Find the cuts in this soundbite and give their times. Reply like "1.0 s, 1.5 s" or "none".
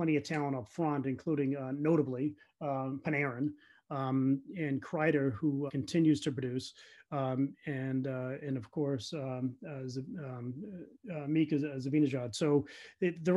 5.7 s